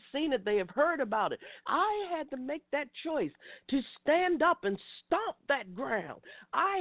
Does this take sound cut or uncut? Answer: cut